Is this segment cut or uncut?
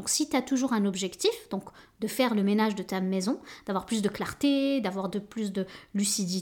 uncut